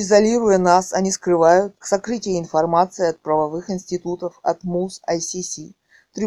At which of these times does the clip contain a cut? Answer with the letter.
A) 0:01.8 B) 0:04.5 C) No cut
A